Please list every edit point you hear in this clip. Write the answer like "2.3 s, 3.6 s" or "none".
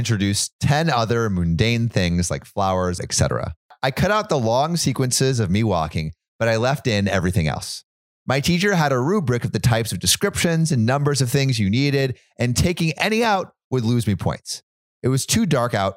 3.0 s

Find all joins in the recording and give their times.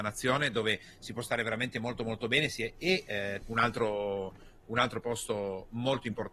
3.4 s

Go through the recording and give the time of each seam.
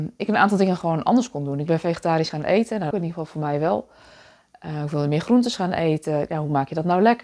2.9 s

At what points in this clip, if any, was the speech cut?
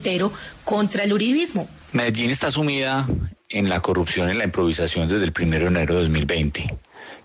1.8 s

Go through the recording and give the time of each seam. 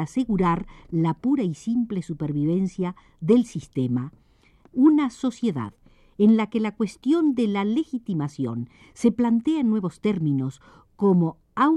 4.6 s

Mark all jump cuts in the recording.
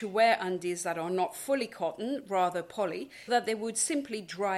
3.3 s

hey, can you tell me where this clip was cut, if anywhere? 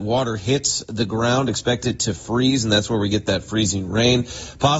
none

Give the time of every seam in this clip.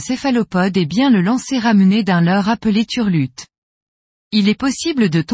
4.2 s

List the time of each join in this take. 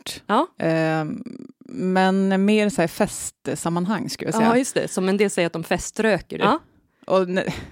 6.4 s

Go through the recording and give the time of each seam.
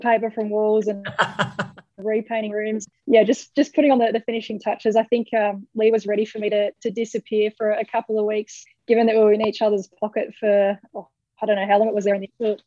none

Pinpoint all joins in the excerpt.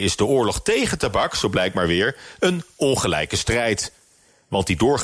none

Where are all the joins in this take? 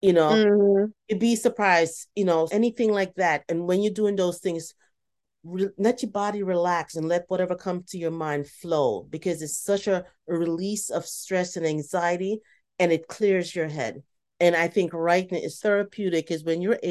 2.5 s, 15.6 s

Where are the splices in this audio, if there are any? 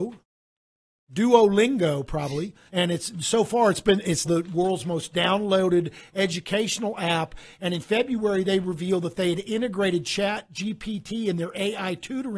2.7 s, 4.2 s

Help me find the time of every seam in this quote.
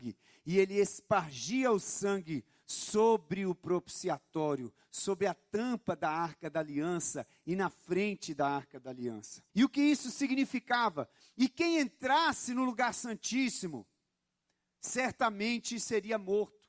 9.5 s, 11.2 s

